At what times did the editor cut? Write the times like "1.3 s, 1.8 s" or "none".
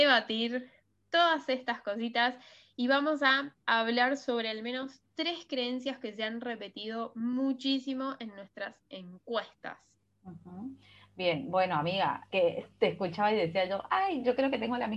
12.3 s